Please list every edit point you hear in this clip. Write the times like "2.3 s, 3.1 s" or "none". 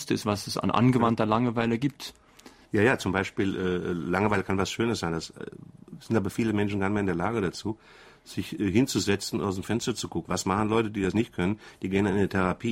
10.2 s